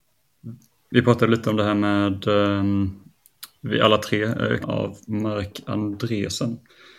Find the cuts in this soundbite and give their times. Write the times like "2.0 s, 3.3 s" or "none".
4.6 s

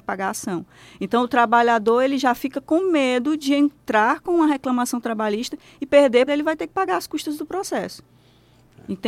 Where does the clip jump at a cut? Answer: 6.3 s

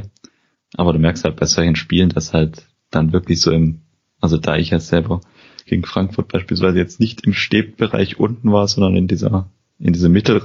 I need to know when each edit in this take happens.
none

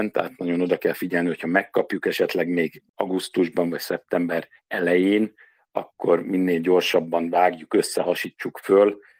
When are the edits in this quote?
4.6 s

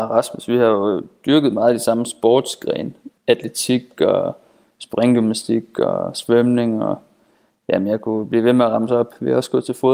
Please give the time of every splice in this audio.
3.2 s

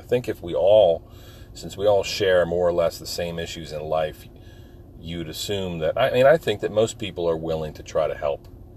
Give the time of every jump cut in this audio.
none

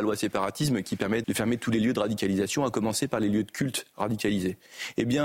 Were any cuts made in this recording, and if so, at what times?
1.2 s

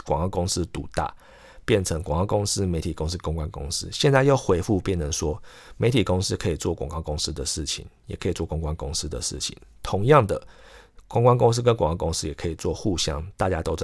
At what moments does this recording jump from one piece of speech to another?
none

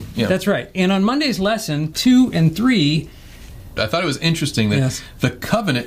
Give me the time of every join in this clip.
1.9 s, 3.8 s

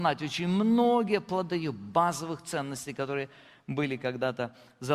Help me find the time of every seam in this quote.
1.5 s

